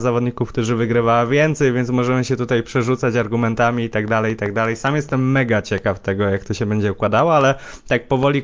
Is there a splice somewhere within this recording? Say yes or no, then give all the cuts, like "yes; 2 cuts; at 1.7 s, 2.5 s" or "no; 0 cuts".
no; 0 cuts